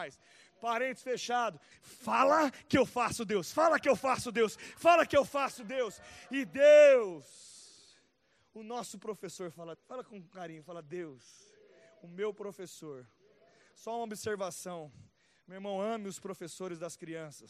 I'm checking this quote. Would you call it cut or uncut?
cut